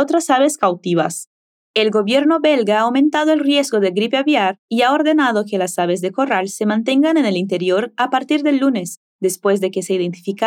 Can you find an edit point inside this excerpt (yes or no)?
no